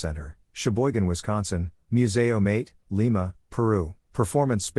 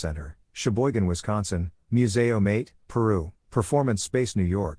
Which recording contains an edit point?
second; 1 cut; at 2.8 s

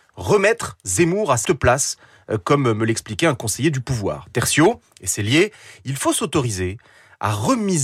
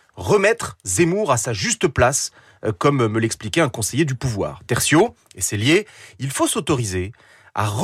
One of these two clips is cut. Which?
first; 1 cut; at 1.5 s

